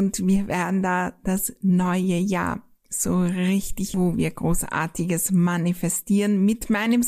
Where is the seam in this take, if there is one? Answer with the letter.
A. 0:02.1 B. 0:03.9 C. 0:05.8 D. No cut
B